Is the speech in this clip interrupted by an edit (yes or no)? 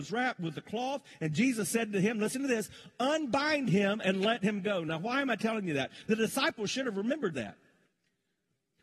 no